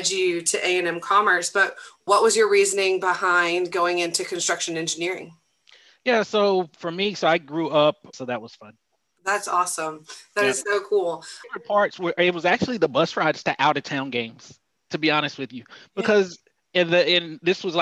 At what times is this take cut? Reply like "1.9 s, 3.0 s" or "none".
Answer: 2.0 s, 8.1 s, 11.4 s